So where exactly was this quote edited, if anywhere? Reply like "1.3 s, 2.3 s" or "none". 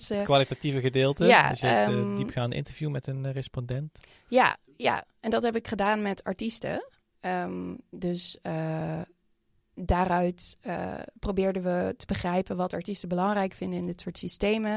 none